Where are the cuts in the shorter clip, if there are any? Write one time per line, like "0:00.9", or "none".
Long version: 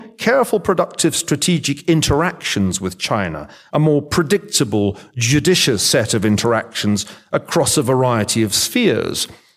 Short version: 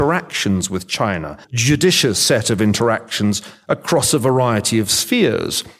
0:01.4